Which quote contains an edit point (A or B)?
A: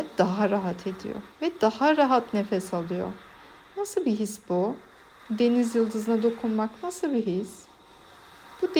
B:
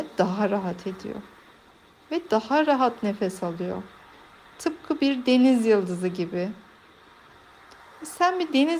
A